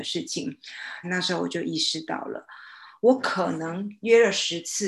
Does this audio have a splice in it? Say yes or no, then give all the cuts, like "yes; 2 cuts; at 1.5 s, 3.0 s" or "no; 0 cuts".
yes; 2 cuts; at 1.0 s, 3.0 s